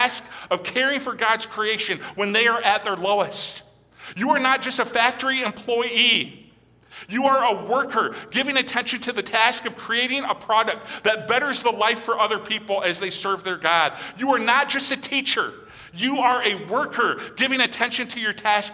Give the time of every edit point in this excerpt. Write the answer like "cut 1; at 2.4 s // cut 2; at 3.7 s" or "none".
none